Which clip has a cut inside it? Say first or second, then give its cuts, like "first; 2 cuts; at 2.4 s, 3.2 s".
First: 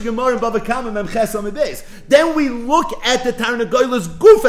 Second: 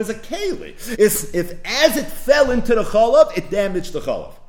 second; 1 cut; at 1.0 s